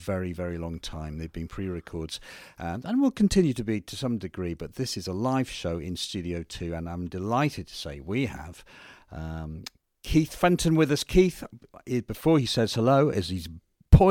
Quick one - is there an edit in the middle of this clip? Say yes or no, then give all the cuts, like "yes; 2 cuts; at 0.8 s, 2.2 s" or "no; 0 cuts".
no; 0 cuts